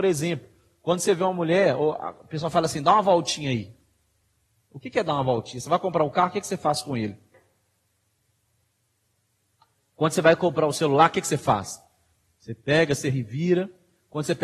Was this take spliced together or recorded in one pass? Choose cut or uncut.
uncut